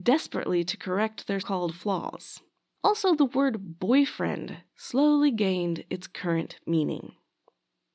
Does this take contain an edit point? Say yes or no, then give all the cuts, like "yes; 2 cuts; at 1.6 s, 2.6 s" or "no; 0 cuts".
yes; 1 cut; at 1.4 s